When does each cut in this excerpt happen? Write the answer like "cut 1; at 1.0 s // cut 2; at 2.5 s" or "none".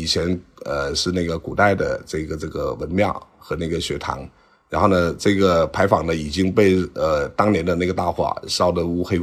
none